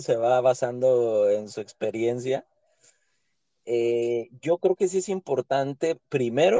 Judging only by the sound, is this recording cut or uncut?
uncut